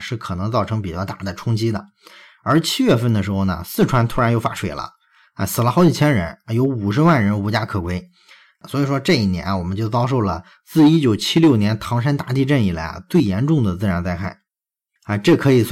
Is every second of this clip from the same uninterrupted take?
yes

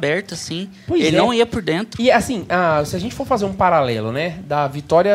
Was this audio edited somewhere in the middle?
no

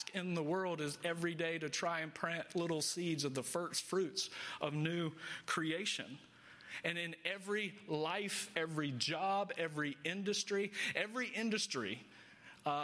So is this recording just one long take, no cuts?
no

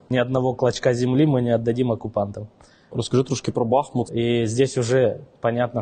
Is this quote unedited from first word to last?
no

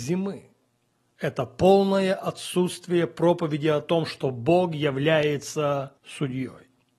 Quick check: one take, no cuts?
no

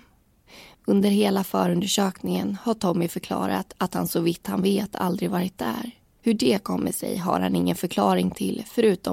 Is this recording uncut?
no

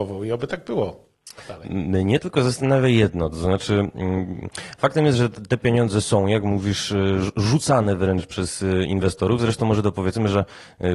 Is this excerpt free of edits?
yes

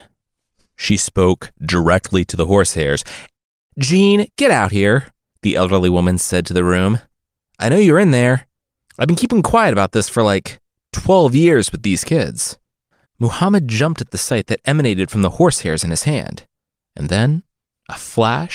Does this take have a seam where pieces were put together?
no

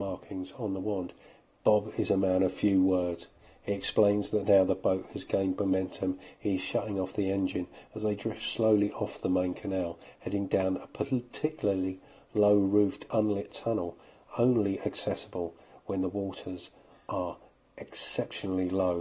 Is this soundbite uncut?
no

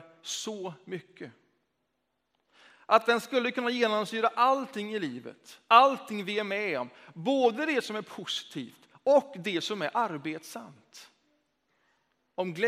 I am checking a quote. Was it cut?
no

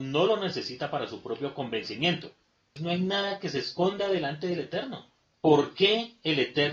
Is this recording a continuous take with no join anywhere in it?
no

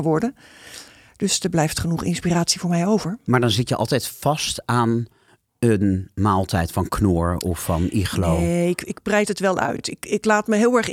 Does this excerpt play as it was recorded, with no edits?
yes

